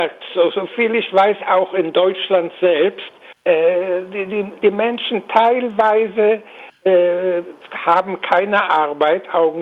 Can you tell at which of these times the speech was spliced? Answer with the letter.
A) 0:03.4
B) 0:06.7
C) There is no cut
A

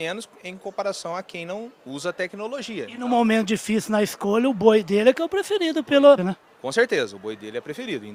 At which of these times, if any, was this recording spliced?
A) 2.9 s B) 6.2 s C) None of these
B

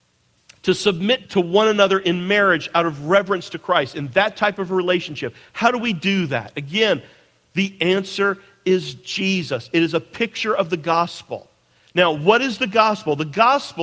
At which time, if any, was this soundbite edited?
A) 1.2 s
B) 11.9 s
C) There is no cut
A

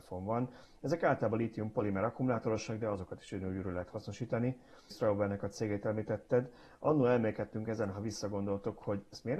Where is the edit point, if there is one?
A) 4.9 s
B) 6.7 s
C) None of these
A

